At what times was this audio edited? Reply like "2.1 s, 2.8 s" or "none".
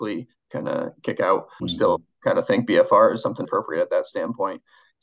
1.6 s, 3.4 s